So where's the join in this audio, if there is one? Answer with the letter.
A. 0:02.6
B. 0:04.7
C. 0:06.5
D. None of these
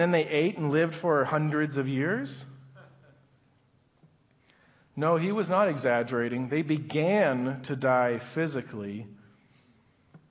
D